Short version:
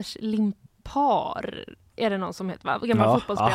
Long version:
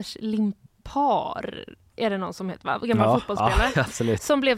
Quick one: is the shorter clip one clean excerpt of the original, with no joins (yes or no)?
yes